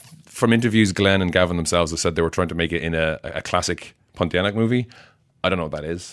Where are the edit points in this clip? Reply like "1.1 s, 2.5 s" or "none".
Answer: none